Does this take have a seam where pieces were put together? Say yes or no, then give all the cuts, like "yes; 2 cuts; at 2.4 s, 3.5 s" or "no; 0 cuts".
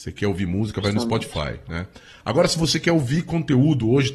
no; 0 cuts